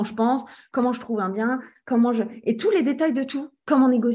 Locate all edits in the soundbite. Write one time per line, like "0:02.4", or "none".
none